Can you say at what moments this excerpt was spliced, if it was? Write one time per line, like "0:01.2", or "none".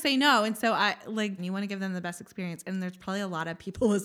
0:01.4